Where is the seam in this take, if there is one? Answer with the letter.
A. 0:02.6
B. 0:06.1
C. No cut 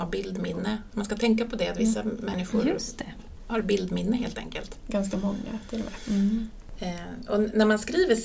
C